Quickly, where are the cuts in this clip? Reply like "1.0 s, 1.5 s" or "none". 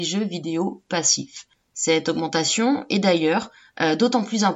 none